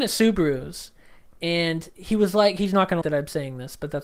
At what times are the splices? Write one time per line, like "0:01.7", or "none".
0:03.0